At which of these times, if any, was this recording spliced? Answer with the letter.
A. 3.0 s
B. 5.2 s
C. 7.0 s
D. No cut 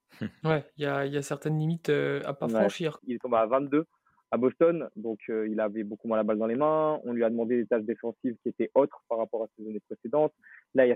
A